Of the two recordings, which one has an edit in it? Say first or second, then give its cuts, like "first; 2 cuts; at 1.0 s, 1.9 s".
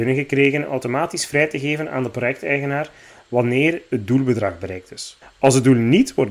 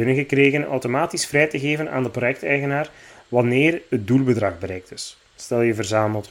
first; 1 cut; at 5.2 s